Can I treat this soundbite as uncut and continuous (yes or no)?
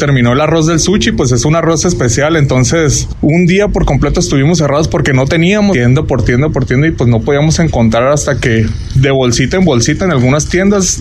no